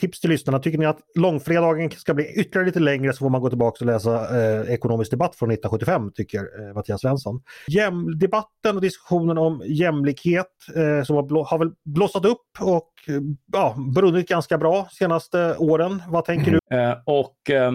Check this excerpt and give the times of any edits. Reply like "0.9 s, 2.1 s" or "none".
7.7 s, 16.6 s